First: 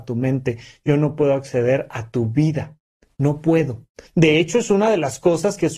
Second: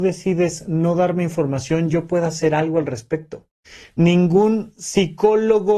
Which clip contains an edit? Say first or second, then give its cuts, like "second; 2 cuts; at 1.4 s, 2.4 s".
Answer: first; 1 cut; at 4.1 s